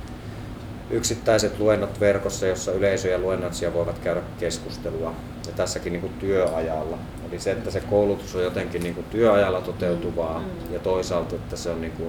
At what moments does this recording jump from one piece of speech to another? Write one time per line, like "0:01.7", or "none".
none